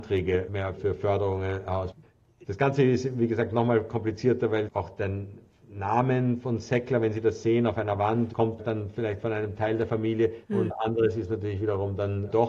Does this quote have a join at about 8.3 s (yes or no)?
yes